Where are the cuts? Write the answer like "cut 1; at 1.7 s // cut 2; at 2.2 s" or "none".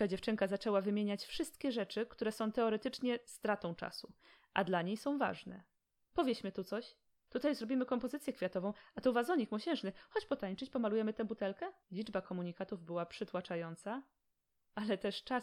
cut 1; at 7.3 s // cut 2; at 11.8 s